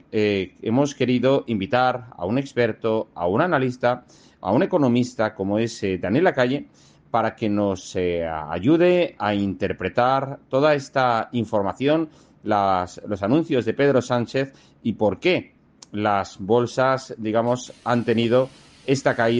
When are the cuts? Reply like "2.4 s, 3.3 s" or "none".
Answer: none